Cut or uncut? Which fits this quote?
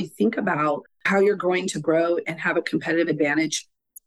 cut